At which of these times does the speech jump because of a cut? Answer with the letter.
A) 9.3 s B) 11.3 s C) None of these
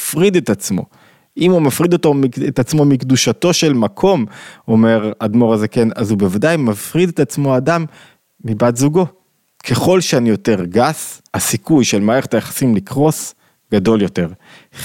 B